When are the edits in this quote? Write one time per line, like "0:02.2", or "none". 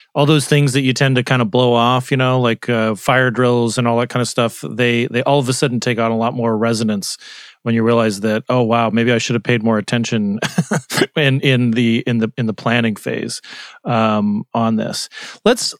none